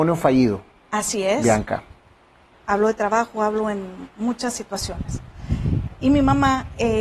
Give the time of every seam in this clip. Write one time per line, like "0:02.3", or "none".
0:02.5

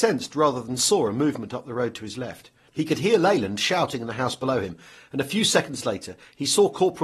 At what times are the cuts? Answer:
0:02.7

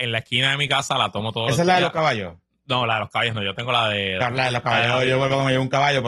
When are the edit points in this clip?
none

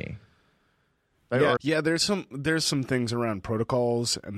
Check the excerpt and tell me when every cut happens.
0:01.6
0:02.6

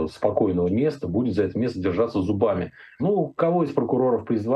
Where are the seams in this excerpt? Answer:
0:03.0

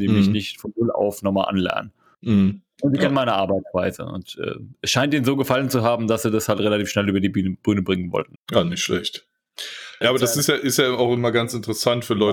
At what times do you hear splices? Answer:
0:08.4
0:10.0

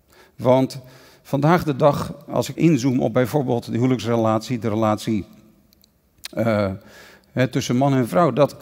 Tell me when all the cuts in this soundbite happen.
0:02.5

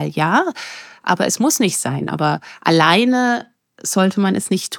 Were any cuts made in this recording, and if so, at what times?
none

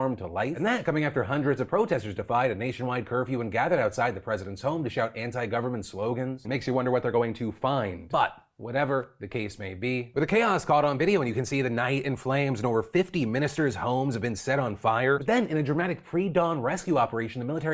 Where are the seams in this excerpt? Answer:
0:06.4
0:10.1
0:15.2

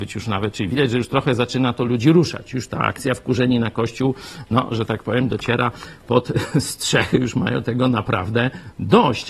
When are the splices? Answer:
none

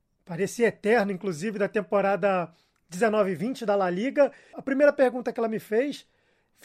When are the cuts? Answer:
none

